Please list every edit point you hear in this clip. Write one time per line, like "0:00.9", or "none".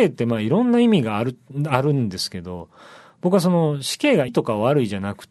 0:04.3